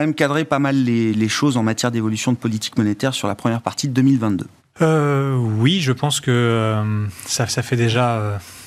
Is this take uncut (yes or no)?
no